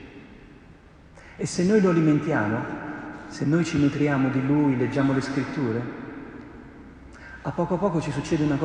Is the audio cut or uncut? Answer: uncut